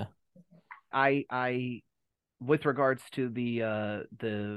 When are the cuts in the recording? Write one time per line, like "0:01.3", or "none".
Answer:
0:00.9